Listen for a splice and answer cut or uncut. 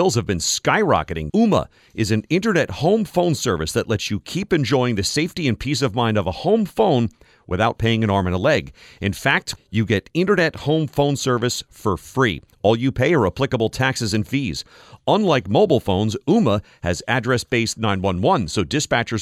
cut